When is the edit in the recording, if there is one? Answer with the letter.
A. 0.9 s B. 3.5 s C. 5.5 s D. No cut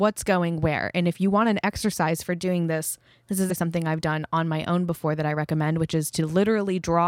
B